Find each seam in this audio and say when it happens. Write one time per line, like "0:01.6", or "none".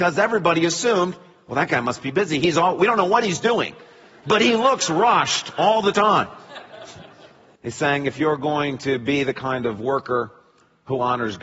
0:07.6